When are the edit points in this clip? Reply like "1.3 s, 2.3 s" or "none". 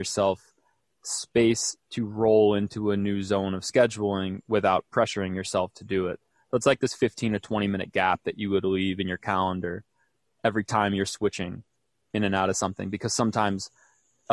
none